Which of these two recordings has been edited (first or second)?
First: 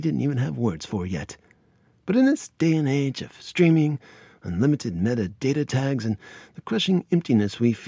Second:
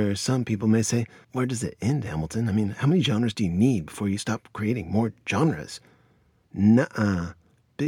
second